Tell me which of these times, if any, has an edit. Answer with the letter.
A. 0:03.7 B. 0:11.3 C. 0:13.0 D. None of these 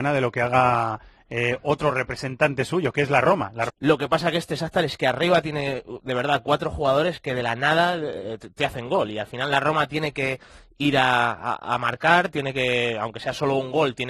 A